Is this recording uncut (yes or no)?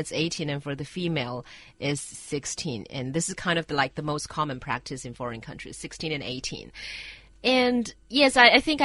yes